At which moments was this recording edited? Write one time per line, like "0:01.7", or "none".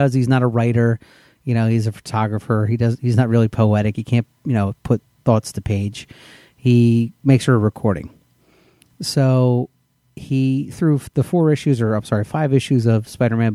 none